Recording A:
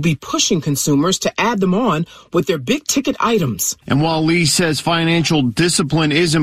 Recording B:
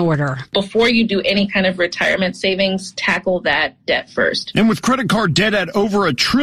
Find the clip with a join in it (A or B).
A